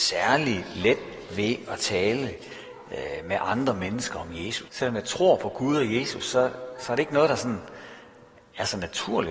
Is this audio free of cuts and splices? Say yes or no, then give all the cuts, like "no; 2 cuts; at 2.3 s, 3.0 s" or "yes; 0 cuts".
no; 1 cut; at 4.7 s